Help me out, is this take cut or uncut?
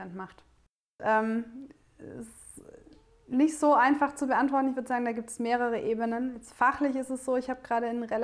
cut